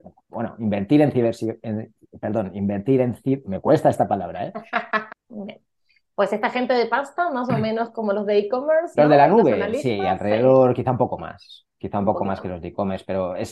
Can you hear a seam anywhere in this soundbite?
yes; 1 cut; at 5.1 s

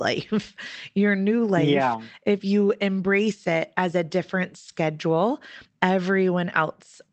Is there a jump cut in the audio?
no; 0 cuts

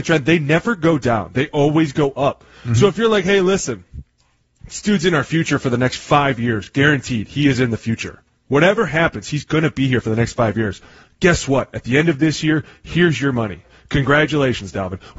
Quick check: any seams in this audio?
no; 0 cuts

